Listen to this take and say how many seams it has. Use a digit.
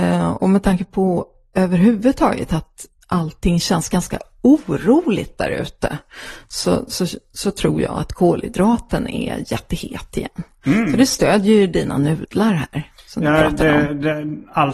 0